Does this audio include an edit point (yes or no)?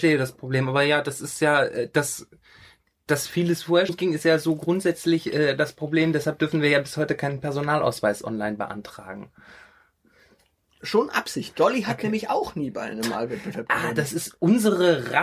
yes